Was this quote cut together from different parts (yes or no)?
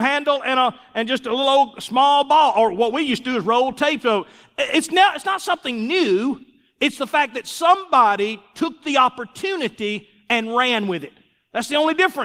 no